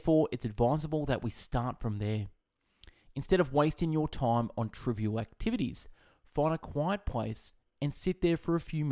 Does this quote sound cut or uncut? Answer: uncut